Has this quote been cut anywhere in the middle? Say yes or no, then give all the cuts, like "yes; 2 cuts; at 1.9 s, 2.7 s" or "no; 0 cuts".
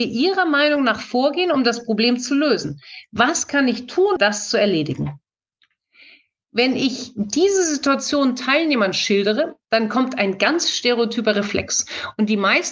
yes; 1 cut; at 4.2 s